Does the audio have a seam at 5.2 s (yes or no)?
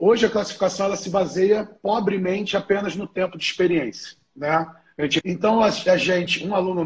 yes